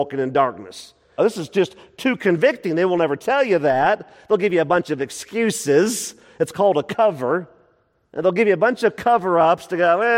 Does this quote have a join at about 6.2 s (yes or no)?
no